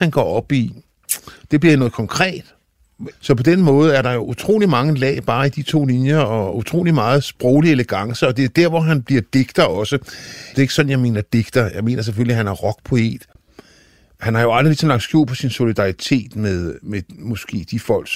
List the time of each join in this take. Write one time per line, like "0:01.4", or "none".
0:03.1
0:10.5

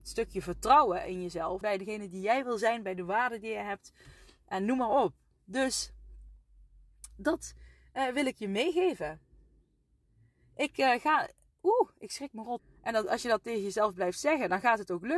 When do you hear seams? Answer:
0:01.6
0:12.6

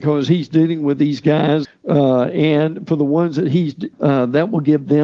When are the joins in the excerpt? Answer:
0:01.6
0:03.9

